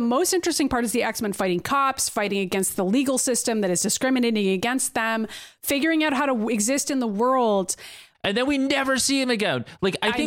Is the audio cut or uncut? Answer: cut